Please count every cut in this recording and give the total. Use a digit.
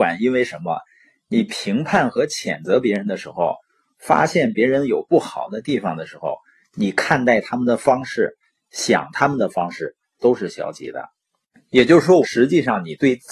2